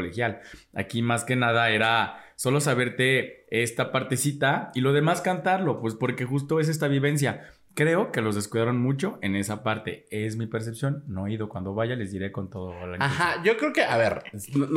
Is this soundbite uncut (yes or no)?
yes